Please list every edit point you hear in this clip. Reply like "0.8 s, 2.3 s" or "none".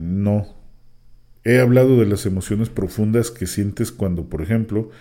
none